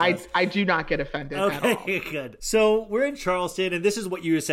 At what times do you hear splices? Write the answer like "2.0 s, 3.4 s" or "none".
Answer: 2.4 s